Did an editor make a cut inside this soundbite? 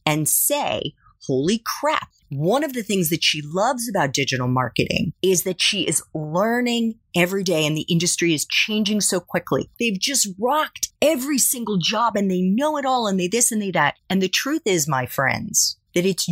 yes; 2 cuts; at 2.2 s, 9.7 s

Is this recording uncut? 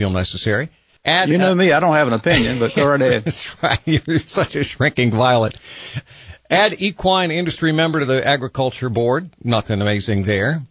yes; 0 cuts

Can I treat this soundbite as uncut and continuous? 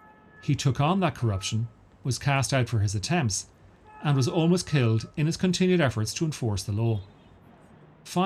yes; 0 cuts

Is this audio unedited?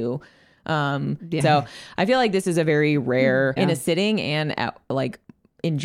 no; 2 cuts; at 1.4 s, 3.6 s

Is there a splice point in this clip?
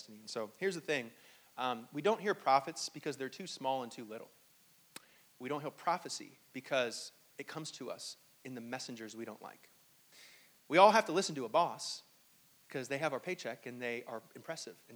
no; 0 cuts

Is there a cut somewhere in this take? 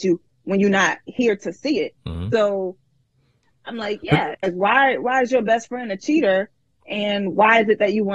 yes; 1 cut; at 4.3 s

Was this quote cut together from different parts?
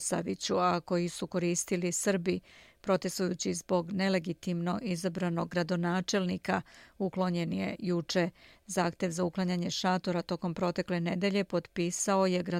no; 0 cuts

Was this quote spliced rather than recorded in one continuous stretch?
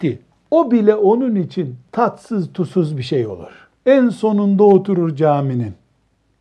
yes; 1 cut; at 3.8 s

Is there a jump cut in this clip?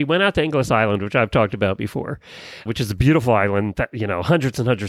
yes; 1 cut; at 2.7 s

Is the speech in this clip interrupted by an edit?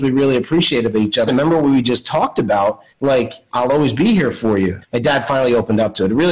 yes; 3 cuts; at 1.3 s, 2.9 s, 4.8 s

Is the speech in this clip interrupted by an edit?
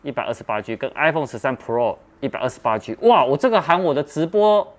no; 0 cuts

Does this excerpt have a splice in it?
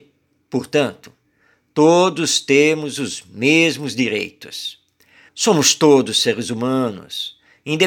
yes; 1 cut; at 5.3 s

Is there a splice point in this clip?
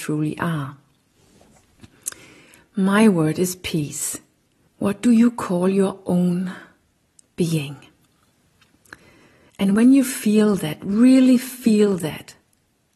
yes; 1 cut; at 4.7 s

